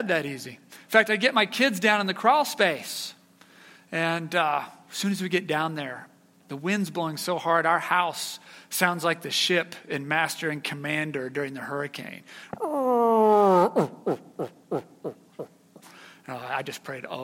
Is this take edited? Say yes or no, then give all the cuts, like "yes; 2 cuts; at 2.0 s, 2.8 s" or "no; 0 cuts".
no; 0 cuts